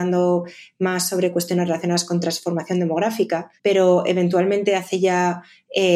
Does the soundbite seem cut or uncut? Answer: cut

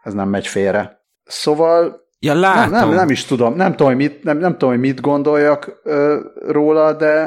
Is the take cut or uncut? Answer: cut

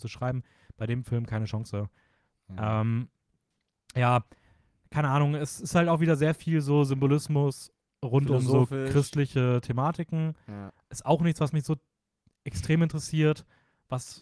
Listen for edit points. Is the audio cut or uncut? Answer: uncut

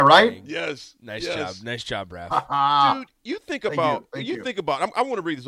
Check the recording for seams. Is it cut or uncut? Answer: uncut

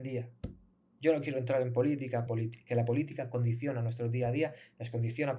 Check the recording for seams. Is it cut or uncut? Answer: cut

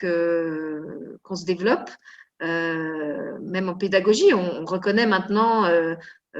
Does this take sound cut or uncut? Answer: uncut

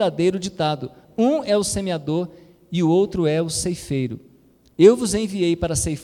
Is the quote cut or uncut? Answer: uncut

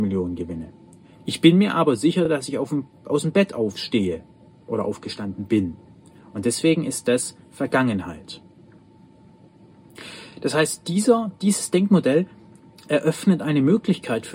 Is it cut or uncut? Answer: uncut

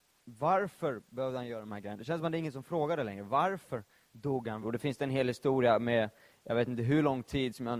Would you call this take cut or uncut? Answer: cut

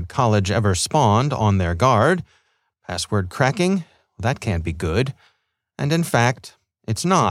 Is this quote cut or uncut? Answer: uncut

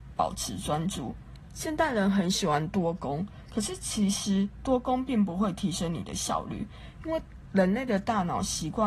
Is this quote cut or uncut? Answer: uncut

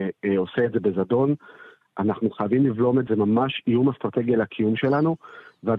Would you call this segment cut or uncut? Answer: cut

